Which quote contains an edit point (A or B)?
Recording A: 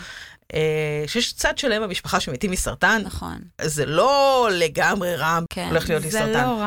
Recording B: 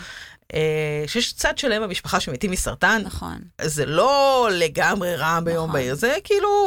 A